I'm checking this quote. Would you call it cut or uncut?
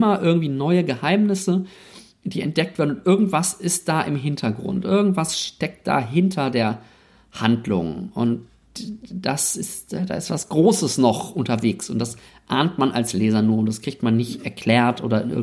uncut